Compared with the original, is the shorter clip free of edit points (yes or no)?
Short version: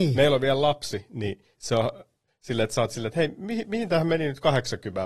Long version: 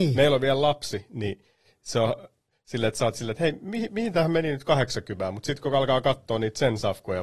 no